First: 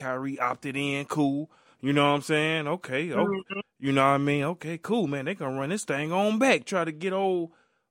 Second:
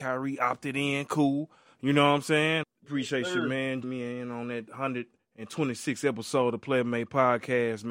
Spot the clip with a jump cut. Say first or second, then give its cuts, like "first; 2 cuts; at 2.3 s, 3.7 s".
second; 2 cuts; at 2.6 s, 3.8 s